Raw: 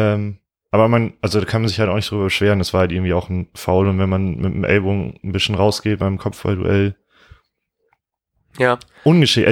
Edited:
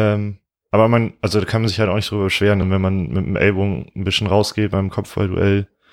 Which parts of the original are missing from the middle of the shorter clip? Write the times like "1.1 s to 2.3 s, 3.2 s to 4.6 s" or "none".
2.6 s to 3.9 s